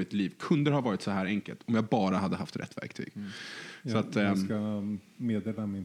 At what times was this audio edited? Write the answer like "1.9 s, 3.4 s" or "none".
none